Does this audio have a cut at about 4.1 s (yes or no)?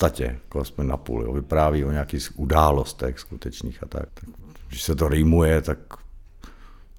yes